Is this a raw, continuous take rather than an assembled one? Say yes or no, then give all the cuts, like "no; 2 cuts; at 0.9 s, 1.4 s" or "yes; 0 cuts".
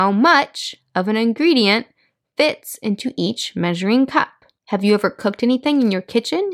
no; 1 cut; at 4.6 s